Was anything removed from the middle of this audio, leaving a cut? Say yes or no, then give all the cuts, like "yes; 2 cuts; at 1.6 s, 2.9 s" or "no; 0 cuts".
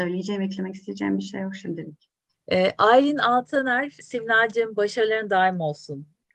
yes; 2 cuts; at 2.3 s, 4.0 s